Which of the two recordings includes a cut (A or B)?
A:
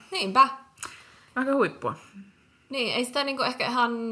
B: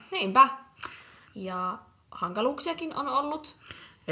B